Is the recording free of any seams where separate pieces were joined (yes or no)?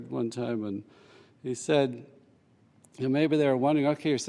yes